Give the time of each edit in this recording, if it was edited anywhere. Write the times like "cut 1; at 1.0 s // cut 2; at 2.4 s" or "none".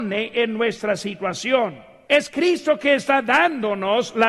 cut 1; at 2.1 s